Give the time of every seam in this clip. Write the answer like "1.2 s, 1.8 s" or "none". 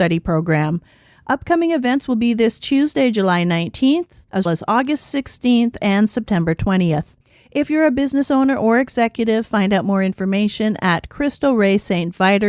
4.5 s